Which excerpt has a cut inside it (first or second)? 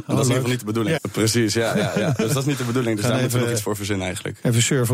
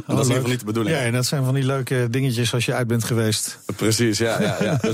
first